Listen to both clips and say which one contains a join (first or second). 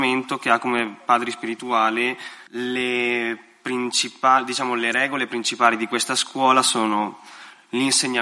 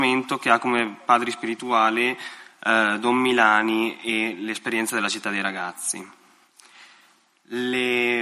first